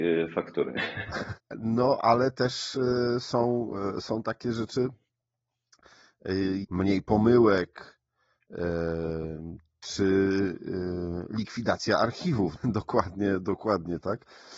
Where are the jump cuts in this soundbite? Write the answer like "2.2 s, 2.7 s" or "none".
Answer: 1.4 s, 6.6 s, 12.6 s